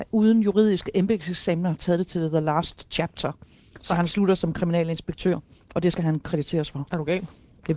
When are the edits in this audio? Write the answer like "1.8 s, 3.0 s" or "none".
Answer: none